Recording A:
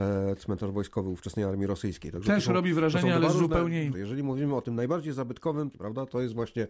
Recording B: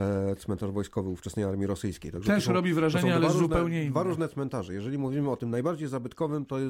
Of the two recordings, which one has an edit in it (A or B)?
A